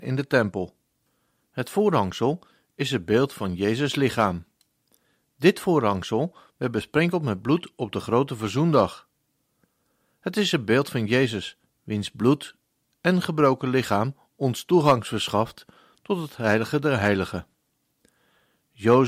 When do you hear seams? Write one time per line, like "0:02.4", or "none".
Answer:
none